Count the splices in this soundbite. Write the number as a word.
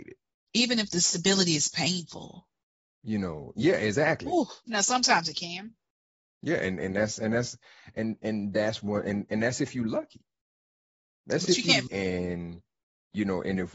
two